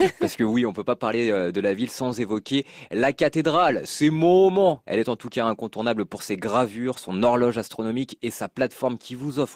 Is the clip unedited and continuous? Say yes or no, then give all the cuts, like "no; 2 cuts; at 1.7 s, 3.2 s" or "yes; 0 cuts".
no; 1 cut; at 4.8 s